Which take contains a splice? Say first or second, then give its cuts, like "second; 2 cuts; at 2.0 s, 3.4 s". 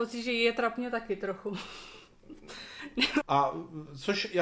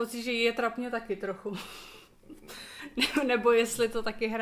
first; 1 cut; at 3.2 s